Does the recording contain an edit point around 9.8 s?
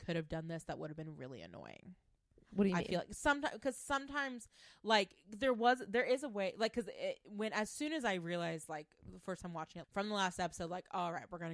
yes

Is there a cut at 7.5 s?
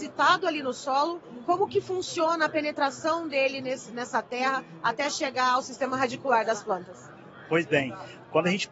no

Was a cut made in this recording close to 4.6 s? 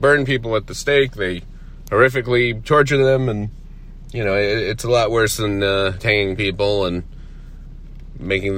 no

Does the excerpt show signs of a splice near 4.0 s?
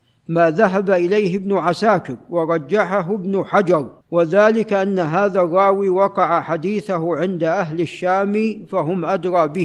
yes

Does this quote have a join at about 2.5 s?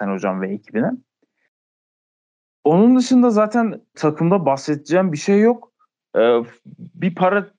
no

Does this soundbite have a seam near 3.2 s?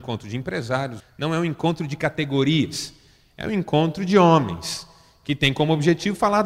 no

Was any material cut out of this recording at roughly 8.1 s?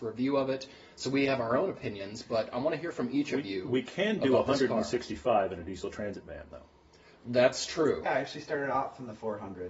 yes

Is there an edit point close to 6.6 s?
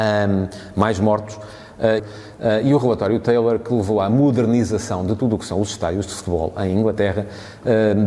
no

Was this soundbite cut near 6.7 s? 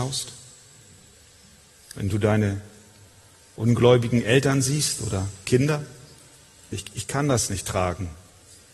yes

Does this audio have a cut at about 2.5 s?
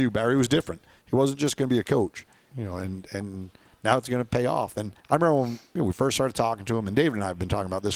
yes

